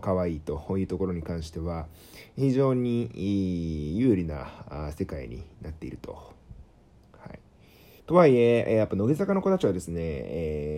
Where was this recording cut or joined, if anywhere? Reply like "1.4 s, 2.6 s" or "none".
8.0 s